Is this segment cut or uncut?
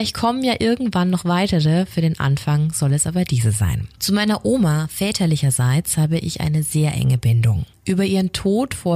uncut